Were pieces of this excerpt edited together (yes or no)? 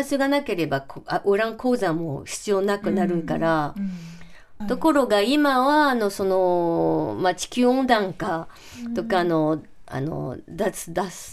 yes